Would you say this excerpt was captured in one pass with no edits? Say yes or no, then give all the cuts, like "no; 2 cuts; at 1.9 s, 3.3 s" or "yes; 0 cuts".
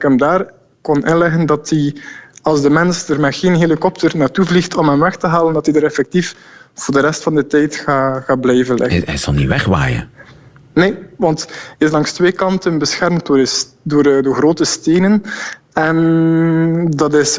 yes; 0 cuts